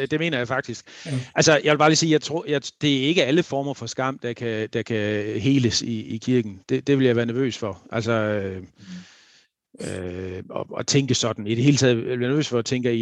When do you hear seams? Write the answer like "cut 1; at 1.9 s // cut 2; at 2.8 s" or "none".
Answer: none